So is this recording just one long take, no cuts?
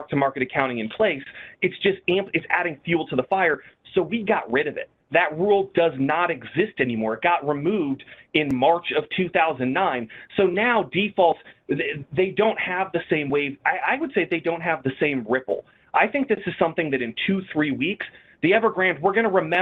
yes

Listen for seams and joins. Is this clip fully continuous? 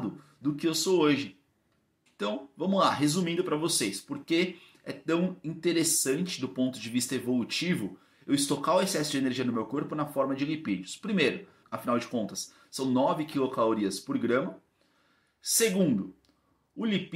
no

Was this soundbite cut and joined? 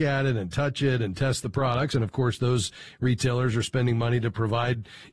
no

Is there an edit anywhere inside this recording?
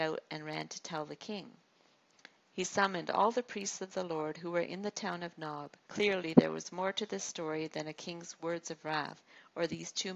yes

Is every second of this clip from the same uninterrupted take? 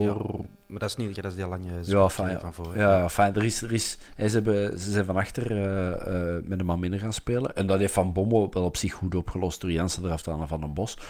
no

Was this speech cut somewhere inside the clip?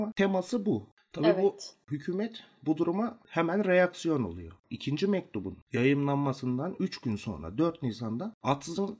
no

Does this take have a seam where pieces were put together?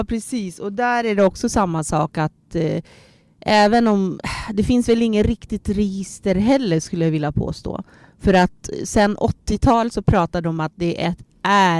no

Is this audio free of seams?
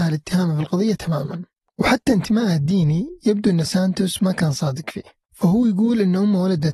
yes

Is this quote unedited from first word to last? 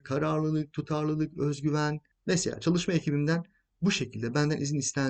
no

